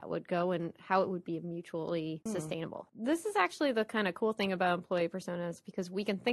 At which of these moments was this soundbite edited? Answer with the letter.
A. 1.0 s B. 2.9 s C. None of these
B